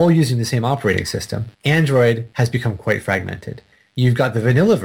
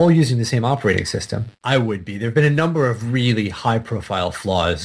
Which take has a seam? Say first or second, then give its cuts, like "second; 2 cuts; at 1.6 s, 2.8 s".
second; 1 cut; at 1.5 s